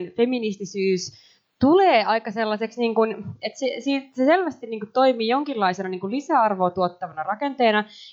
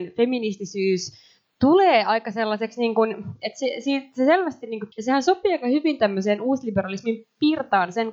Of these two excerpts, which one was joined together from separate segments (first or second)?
second